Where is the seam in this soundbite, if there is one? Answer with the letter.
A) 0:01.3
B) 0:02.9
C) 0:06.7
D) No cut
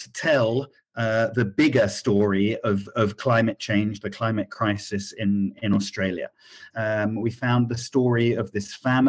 C